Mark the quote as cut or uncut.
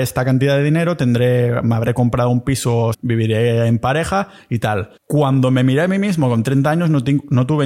cut